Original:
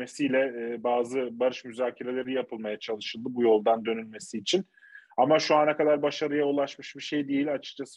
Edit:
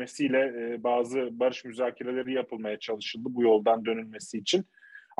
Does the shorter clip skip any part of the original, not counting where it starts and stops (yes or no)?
no